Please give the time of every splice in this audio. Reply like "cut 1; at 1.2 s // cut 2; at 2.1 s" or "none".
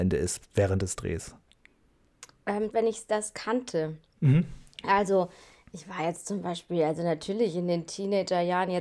cut 1; at 2.7 s